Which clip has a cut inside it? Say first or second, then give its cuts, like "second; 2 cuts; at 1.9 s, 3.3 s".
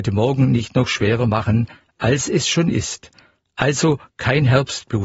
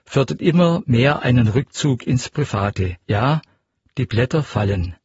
second; 1 cut; at 3.0 s